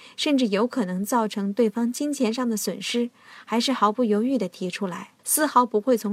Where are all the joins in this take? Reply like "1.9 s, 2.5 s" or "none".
5.2 s